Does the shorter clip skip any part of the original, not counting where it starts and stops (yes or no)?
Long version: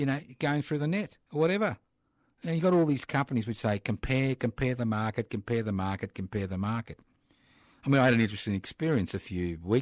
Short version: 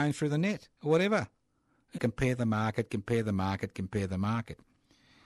yes